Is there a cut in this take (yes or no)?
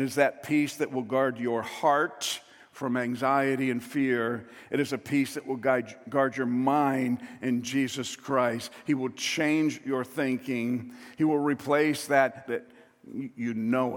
yes